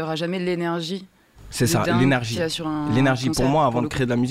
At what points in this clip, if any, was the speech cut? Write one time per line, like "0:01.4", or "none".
none